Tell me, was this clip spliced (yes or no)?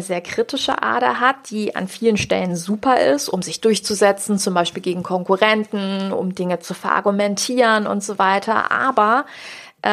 no